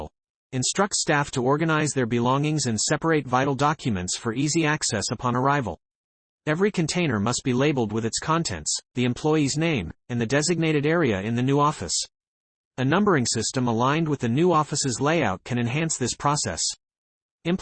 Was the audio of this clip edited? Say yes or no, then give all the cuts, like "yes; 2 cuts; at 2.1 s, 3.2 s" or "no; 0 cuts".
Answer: no; 0 cuts